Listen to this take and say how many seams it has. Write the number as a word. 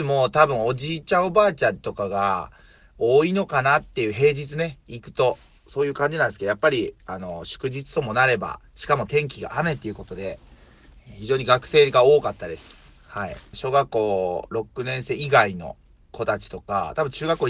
two